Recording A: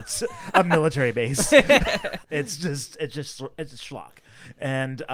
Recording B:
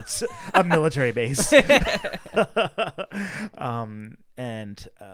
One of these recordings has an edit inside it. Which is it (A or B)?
A